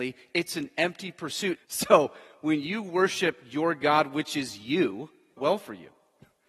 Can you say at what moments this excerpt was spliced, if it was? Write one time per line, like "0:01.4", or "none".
0:01.6
0:05.4